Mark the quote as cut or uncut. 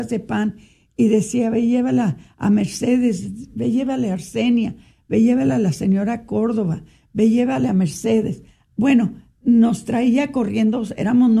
uncut